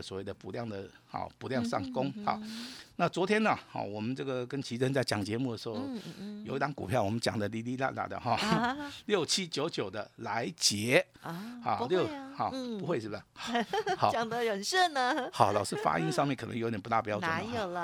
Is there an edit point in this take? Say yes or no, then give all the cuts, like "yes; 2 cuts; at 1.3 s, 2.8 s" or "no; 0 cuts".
no; 0 cuts